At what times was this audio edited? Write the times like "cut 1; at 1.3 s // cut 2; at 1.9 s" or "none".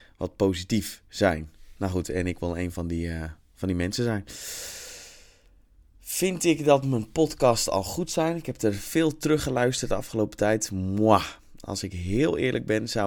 none